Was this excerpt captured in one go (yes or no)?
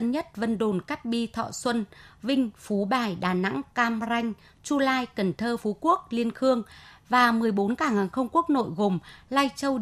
yes